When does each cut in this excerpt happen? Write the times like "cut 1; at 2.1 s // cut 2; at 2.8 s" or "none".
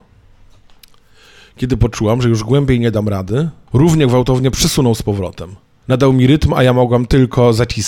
cut 1; at 3.7 s // cut 2; at 5.8 s

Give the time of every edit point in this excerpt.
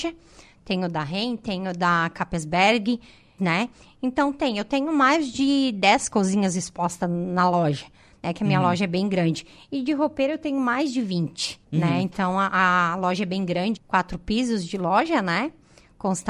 cut 1; at 3.4 s // cut 2; at 11.6 s // cut 3; at 13.8 s

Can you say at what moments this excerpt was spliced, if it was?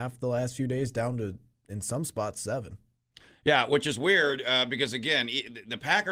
none

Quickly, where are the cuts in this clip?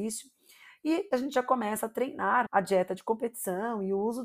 cut 1; at 2.5 s

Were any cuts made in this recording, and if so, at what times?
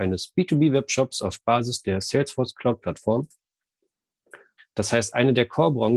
cut 1; at 4.6 s

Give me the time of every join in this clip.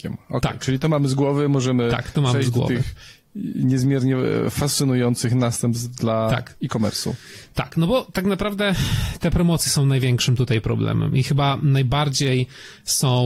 none

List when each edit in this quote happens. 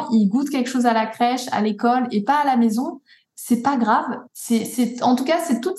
cut 1; at 4.3 s

